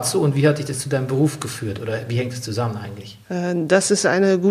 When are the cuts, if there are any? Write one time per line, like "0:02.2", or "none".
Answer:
0:03.2